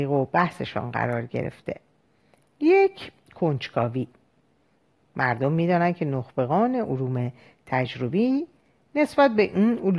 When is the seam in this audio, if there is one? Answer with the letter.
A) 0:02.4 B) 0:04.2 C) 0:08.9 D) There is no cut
A